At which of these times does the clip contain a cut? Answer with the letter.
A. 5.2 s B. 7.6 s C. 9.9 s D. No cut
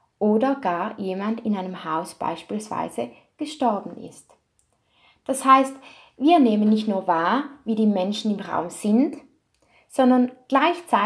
D